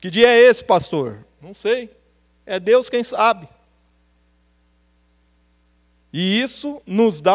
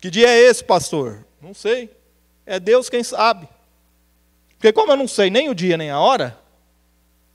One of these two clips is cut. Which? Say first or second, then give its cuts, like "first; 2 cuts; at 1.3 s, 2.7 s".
second; 1 cut; at 4.3 s